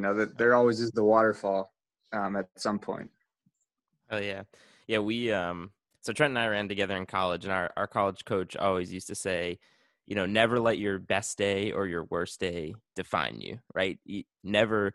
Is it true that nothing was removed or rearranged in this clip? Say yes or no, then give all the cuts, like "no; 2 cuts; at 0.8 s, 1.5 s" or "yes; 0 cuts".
yes; 0 cuts